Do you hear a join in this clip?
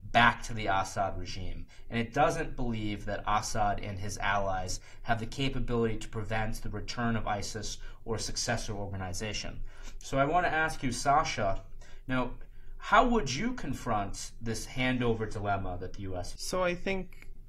yes; 1 cut; at 16.4 s

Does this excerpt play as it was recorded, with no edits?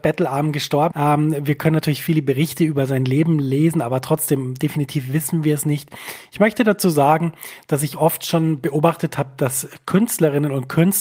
no; 1 cut; at 0.9 s

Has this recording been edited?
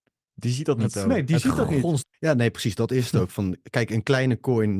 yes; 1 cut; at 2.0 s

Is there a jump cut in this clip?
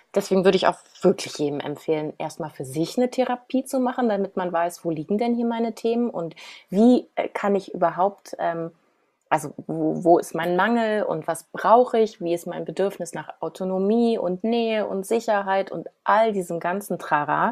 no; 0 cuts

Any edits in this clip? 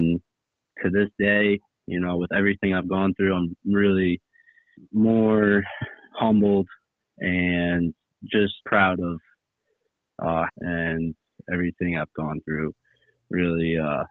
yes; 2 cuts; at 8.6 s, 10.5 s

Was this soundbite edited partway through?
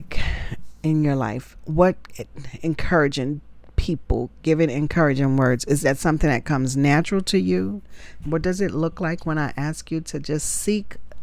yes; 1 cut; at 8.2 s

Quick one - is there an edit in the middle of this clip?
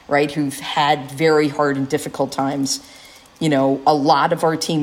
no; 0 cuts

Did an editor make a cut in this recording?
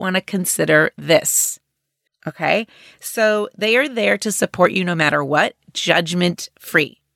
yes; 1 cut; at 2.1 s

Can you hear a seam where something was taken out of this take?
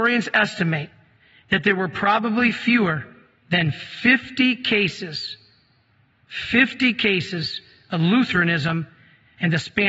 no; 0 cuts

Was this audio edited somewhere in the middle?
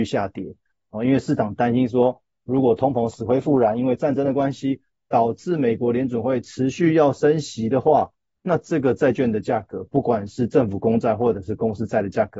no; 0 cuts

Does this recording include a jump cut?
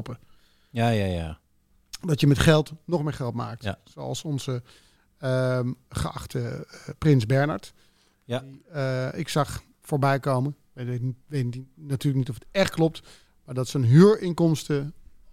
no; 0 cuts

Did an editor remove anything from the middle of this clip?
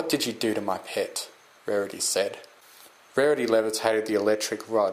no; 0 cuts

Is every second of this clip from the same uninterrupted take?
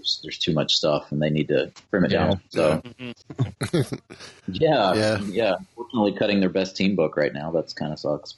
no; 1 cut; at 3.2 s

